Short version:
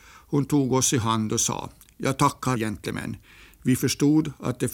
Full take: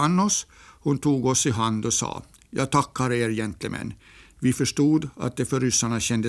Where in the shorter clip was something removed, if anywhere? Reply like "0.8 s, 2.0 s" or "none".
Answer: 2.6 s